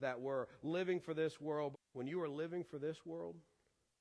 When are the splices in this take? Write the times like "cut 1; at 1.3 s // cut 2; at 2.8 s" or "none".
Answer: cut 1; at 1.7 s